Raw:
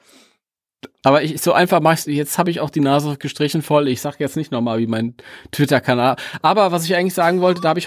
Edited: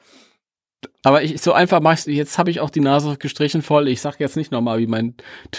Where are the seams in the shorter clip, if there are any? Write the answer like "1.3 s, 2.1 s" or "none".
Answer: none